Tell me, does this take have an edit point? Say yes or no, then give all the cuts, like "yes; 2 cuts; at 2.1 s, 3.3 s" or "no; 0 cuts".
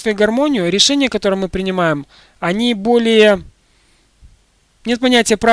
no; 0 cuts